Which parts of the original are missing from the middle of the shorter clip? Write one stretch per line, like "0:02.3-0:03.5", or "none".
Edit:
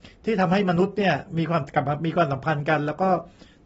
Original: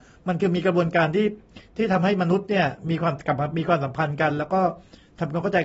none